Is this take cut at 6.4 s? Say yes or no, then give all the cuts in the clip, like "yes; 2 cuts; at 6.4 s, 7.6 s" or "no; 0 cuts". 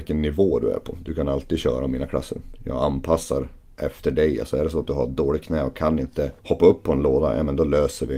yes; 1 cut; at 6.4 s